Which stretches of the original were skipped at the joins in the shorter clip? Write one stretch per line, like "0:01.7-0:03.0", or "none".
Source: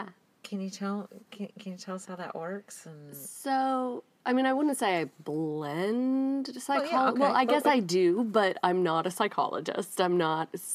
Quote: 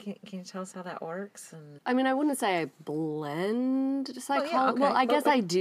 0:03.1-0:04.2